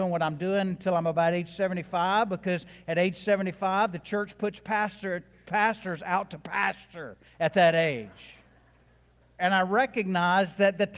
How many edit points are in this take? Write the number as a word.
one